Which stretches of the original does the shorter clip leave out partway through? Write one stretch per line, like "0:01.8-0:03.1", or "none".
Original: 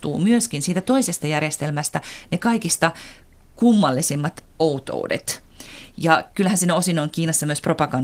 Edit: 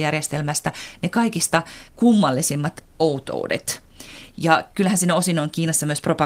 0:03.2-0:03.5